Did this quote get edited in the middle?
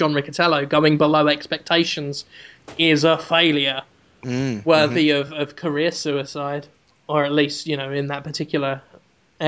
no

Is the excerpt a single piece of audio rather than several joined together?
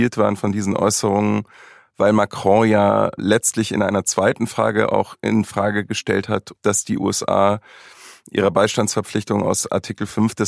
no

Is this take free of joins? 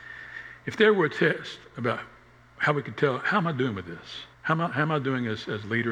no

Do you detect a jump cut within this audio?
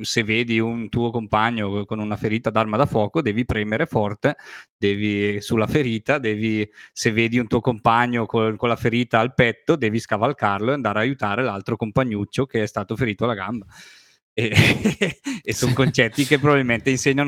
no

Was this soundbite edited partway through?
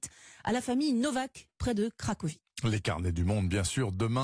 no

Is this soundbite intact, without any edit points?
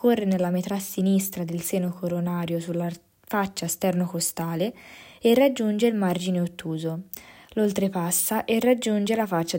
yes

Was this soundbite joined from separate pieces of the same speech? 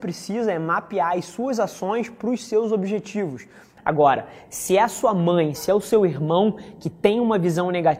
yes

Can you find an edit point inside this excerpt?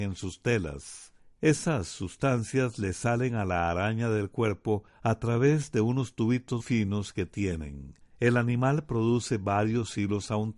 yes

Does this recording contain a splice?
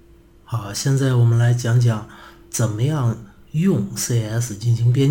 no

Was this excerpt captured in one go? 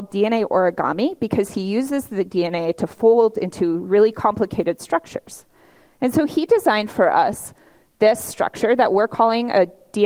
yes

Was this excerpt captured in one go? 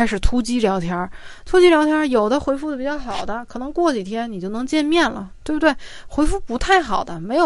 yes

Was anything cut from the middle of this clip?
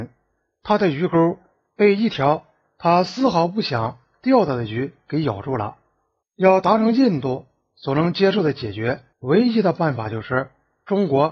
yes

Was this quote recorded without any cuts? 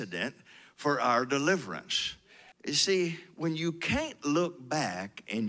no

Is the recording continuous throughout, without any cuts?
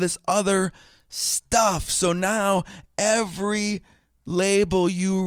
yes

